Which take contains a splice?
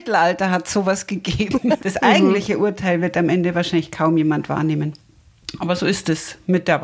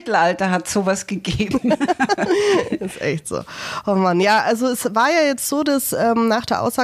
first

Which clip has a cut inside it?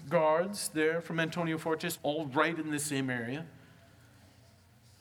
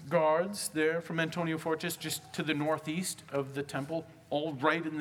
first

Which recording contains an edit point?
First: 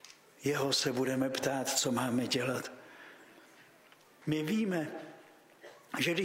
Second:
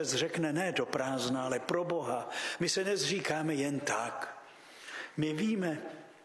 first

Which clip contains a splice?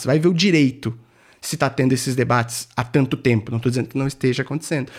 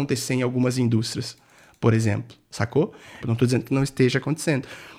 second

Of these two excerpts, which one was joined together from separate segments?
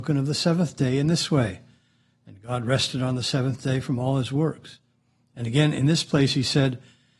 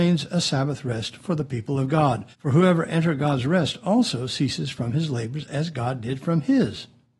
second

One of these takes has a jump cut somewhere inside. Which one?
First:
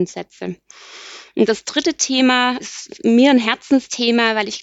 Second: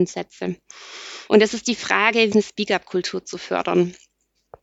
second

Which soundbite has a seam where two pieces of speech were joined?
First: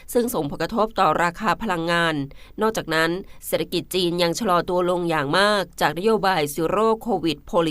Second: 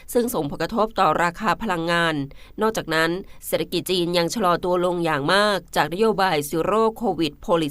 second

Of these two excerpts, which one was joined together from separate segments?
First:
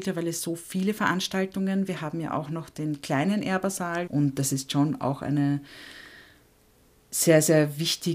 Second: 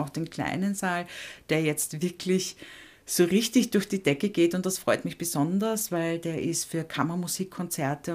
first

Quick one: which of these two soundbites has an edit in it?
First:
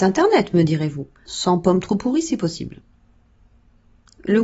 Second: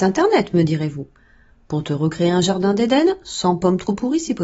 first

